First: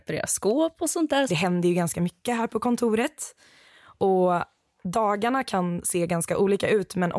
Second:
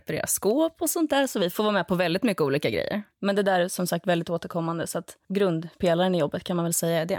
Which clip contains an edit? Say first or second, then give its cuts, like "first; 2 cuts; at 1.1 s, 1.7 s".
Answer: first; 1 cut; at 1.3 s